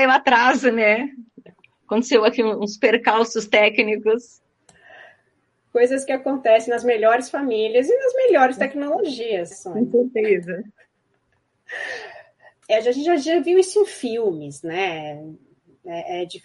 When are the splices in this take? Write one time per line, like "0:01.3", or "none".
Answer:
0:09.5
0:12.6